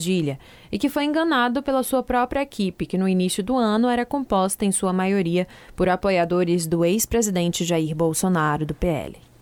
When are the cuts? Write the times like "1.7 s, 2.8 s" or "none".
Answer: none